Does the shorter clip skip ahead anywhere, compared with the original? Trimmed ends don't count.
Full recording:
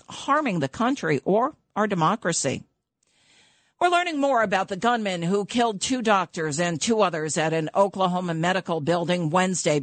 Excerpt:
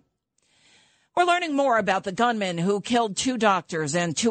no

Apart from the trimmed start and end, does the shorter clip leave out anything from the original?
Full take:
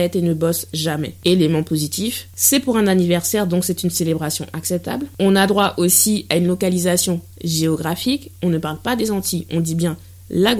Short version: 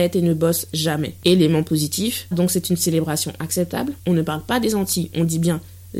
yes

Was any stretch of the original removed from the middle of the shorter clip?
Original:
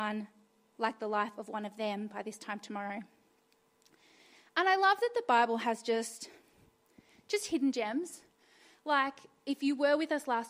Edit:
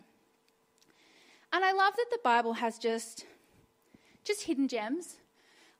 no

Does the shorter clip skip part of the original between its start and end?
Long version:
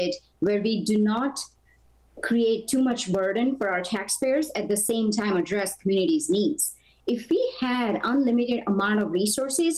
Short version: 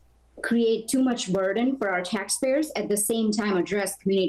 no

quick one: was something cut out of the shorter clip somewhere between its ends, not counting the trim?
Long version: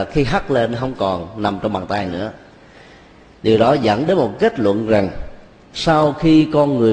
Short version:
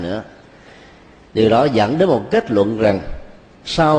no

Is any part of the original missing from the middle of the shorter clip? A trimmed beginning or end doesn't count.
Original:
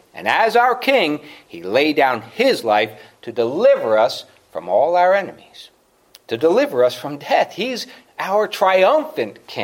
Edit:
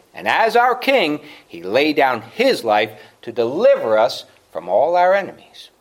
no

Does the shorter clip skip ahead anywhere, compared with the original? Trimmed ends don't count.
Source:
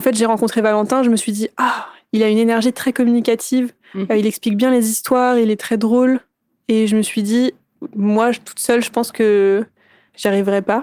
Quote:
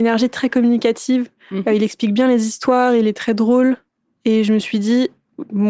no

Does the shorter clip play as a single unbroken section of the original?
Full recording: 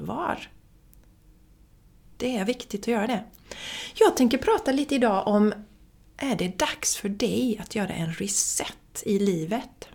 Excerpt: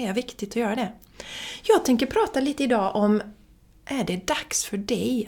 yes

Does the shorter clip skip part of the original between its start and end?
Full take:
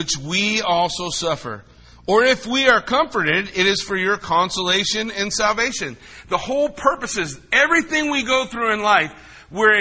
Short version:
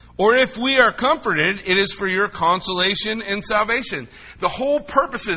no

